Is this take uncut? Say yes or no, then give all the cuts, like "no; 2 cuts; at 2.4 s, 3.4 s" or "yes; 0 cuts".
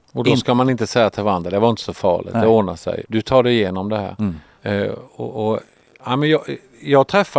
no; 2 cuts; at 3.0 s, 4.6 s